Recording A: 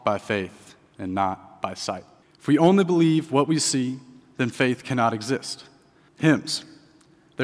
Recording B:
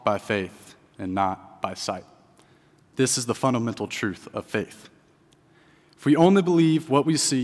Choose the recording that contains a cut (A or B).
A